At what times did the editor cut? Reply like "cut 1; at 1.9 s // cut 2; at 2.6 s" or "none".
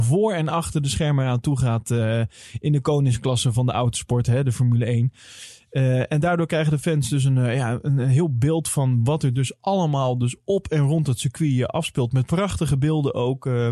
none